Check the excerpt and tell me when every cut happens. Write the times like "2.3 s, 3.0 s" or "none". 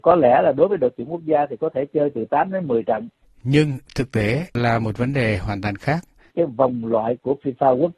3.2 s, 6.3 s